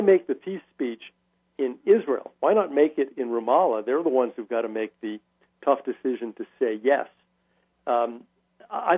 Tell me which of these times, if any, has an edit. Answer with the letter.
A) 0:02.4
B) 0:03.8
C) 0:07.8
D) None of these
D